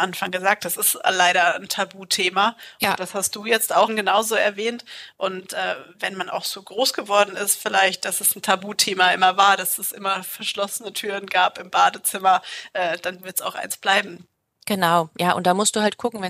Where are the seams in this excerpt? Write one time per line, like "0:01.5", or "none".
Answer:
0:03.9